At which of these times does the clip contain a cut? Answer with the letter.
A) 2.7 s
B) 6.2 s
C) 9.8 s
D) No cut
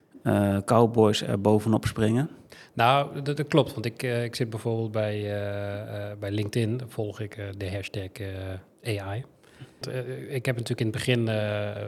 C